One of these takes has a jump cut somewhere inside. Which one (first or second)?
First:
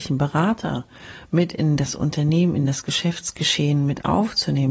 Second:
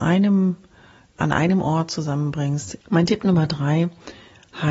second